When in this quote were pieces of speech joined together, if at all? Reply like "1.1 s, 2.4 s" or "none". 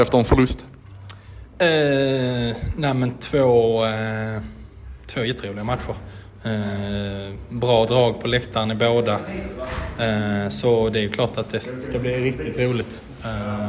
none